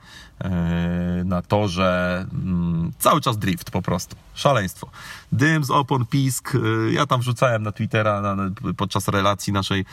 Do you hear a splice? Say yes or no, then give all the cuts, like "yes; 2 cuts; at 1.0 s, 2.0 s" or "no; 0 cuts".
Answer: no; 0 cuts